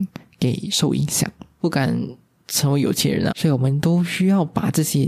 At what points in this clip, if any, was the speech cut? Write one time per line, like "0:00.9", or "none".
0:01.6
0:03.3